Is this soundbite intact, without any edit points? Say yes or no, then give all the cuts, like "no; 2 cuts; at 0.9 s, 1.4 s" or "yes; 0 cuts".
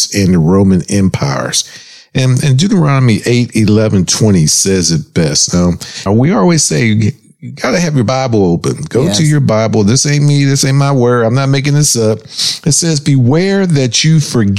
no; 1 cut; at 6.1 s